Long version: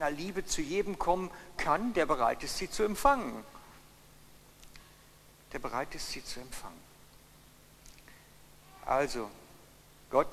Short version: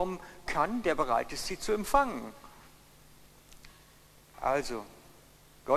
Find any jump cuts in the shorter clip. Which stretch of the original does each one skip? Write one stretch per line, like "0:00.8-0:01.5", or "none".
0:05.4-0:08.8